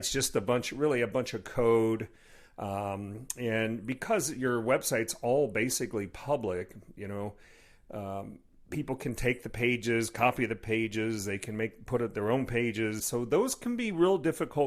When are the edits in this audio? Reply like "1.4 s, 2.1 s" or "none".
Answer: 13.0 s